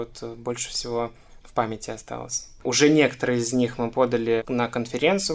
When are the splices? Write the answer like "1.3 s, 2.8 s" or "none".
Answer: 2.6 s